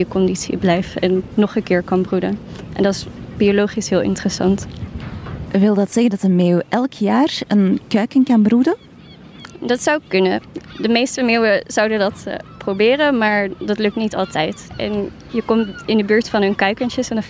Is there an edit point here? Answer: yes; 1 cut; at 14.7 s

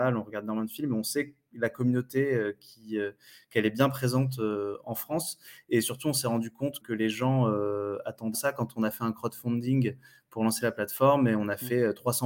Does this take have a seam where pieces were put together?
yes; 2 cuts; at 6.8 s, 8.3 s

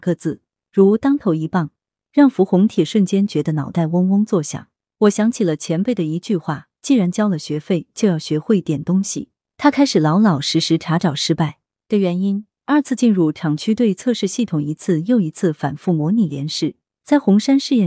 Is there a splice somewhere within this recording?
no; 0 cuts

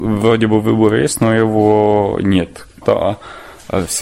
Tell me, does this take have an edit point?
yes; 1 cut; at 2.8 s

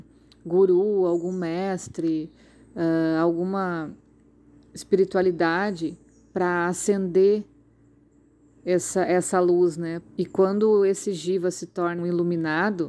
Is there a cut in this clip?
yes; 2 cuts; at 10.0 s, 12.0 s

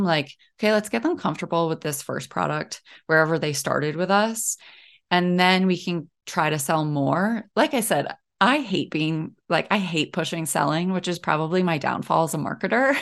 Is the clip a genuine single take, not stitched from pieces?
no; 1 cut; at 6.2 s

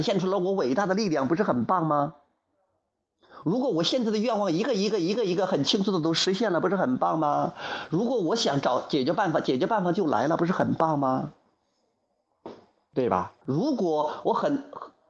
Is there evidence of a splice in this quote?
yes; 1 cut; at 13.4 s

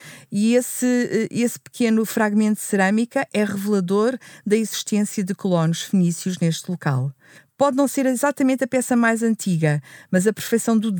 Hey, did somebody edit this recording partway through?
no; 0 cuts

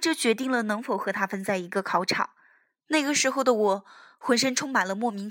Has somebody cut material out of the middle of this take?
yes; 1 cut; at 2.8 s

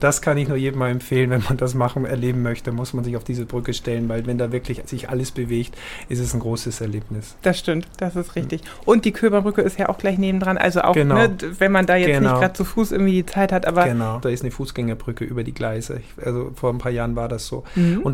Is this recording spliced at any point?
yes; 1 cut; at 14.2 s

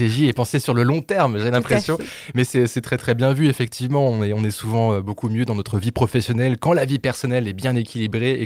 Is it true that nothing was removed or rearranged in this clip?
yes; 0 cuts

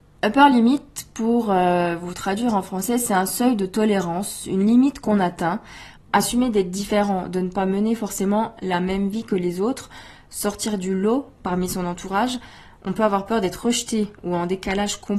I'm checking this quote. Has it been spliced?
yes; 1 cut; at 5.9 s

